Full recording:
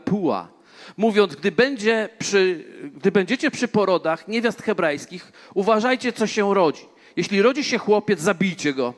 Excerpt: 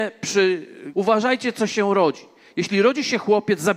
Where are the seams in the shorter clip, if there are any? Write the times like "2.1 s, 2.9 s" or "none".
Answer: 0.9 s